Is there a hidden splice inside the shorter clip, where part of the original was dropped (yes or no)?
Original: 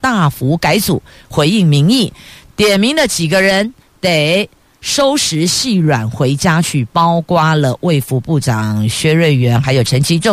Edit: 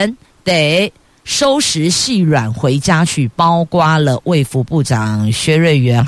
no